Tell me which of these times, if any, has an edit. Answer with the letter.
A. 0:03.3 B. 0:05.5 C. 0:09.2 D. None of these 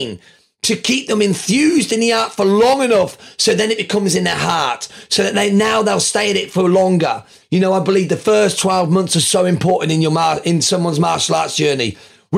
D